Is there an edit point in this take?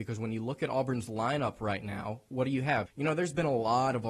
yes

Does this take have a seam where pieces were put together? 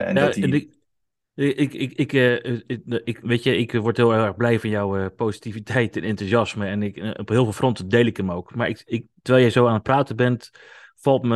no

